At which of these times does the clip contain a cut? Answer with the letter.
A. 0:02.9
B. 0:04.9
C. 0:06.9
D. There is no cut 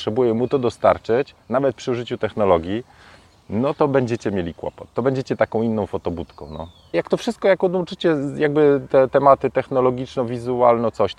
C